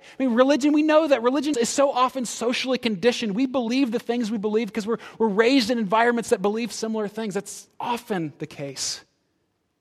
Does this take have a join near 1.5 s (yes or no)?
yes